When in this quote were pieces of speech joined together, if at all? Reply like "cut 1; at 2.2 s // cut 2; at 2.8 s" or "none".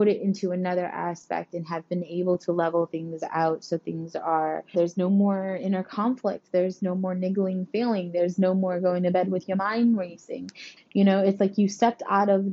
cut 1; at 4.7 s // cut 2; at 10.8 s